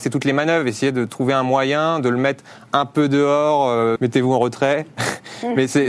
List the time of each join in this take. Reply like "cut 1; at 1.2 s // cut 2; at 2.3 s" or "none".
cut 1; at 4.0 s